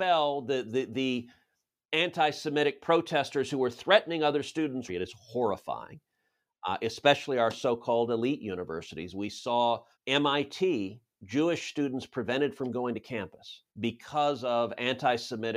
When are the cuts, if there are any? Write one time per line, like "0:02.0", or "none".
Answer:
0:04.9
0:09.9
0:13.7